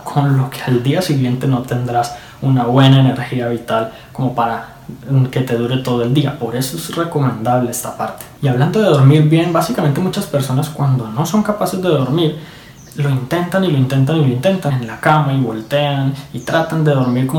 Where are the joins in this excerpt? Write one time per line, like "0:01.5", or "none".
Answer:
0:14.7